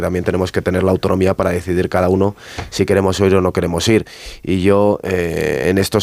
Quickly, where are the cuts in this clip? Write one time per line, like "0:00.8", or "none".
none